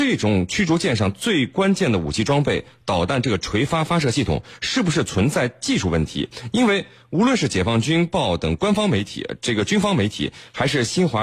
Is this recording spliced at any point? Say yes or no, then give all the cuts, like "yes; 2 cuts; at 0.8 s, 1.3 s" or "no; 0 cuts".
no; 0 cuts